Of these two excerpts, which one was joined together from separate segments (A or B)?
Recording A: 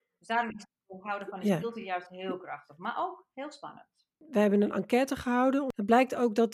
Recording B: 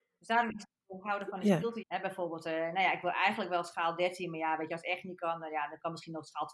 B